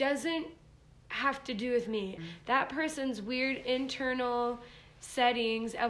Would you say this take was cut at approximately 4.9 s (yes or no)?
no